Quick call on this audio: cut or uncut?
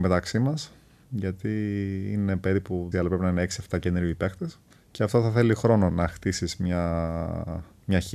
cut